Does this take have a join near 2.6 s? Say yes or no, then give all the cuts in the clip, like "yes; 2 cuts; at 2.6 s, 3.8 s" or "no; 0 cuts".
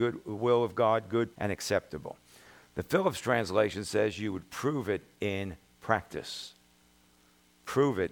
no; 1 cut; at 1.3 s